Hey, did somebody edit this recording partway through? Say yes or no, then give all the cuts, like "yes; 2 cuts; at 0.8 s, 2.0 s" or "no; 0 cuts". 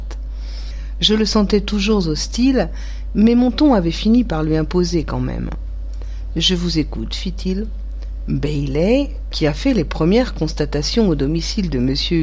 yes; 2 cuts; at 8.2 s, 9.3 s